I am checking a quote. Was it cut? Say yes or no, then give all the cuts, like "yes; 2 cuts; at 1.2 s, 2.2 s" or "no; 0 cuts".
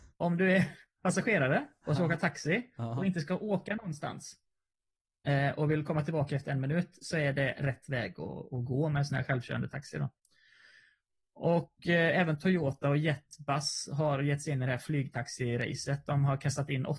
no; 0 cuts